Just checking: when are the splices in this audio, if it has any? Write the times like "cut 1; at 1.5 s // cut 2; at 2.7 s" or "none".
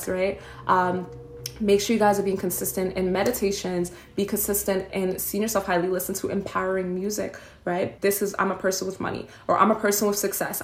cut 1; at 8.0 s